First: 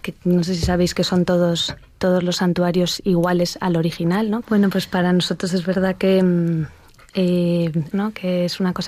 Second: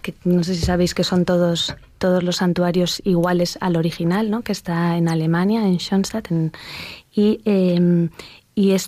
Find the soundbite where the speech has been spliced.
first; 2 cuts; at 4.4 s, 7.9 s

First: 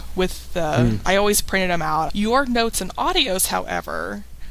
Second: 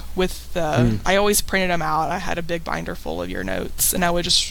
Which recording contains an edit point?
first; 1 cut; at 2.1 s

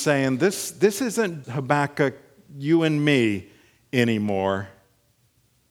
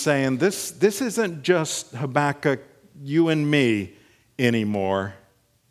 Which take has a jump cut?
first; 1 cut; at 1.4 s

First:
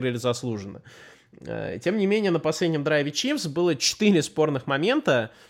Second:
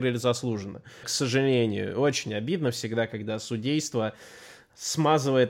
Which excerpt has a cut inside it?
second; 1 cut; at 1.0 s

